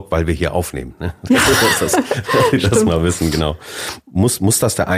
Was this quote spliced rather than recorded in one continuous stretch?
yes; 1 cut; at 4.0 s

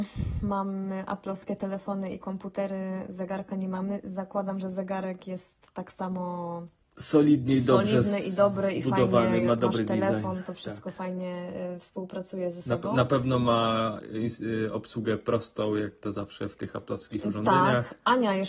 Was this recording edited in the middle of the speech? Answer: no; 0 cuts

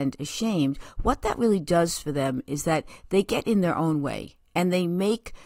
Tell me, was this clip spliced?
no; 0 cuts

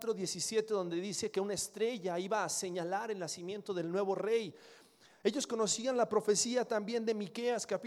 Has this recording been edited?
no; 0 cuts

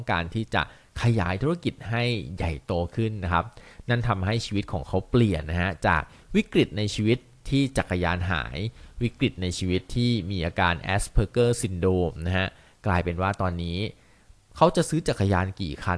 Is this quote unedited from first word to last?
yes; 0 cuts

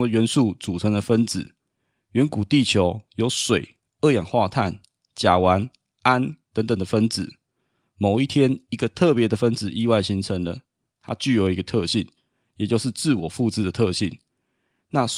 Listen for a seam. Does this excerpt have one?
no; 0 cuts

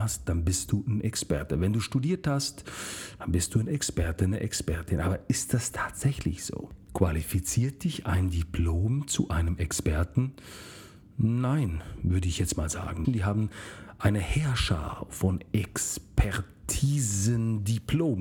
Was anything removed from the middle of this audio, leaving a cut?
yes; 1 cut; at 13.0 s

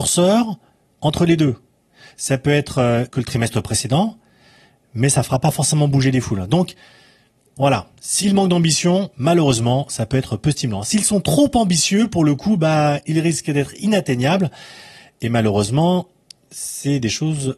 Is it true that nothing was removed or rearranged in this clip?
no; 2 cuts; at 3.1 s, 9.1 s

